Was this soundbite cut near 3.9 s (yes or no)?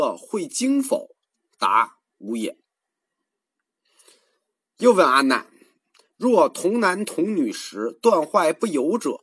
no